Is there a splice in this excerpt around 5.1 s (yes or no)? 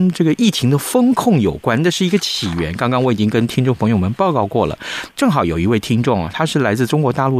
yes